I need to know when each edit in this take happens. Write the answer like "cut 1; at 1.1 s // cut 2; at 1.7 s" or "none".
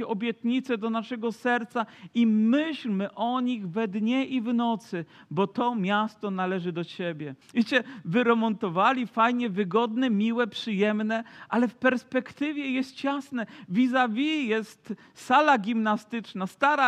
cut 1; at 7.4 s